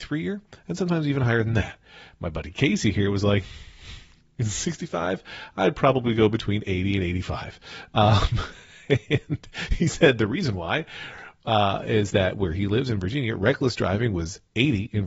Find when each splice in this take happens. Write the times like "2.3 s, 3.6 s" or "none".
none